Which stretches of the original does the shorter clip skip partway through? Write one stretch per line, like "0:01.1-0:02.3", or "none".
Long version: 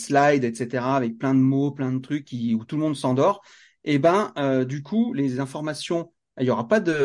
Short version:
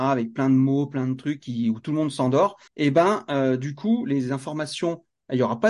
0:03.5-0:03.8